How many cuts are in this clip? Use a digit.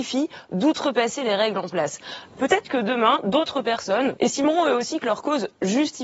1